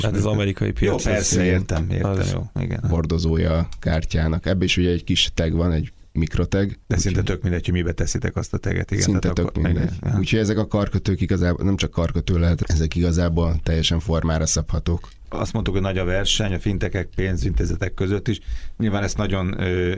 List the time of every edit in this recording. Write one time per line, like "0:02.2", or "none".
0:02.8